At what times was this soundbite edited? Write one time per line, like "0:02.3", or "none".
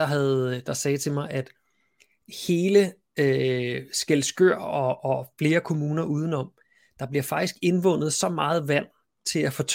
none